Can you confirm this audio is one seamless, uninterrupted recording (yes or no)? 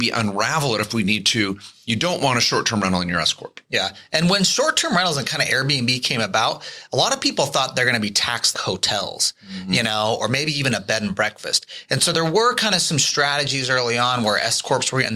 no